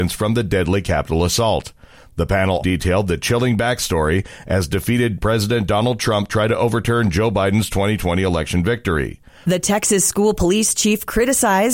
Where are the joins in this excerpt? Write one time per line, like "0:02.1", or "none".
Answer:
0:02.6
0:09.4